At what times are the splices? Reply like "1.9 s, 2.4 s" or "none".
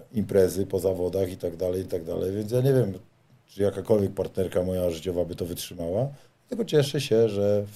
none